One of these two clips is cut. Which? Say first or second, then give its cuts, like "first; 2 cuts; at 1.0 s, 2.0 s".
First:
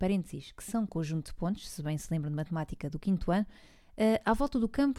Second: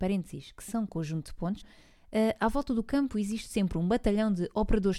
second; 1 cut; at 1.6 s